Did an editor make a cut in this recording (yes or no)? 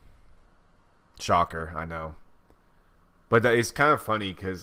no